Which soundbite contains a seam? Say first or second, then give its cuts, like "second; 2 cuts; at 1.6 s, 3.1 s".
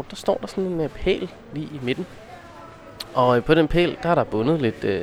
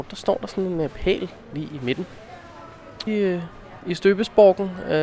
second; 1 cut; at 3.1 s